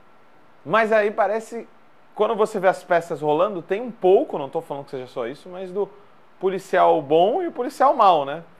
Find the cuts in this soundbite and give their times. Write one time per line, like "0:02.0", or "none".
none